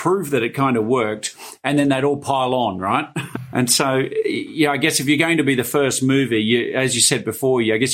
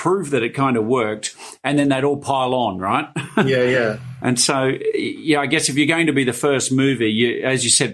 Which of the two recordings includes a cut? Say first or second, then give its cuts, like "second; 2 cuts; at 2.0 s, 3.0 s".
first; 1 cut; at 3.3 s